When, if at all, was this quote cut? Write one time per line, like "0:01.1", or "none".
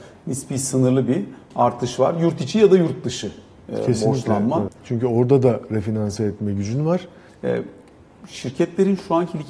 0:04.7
0:07.3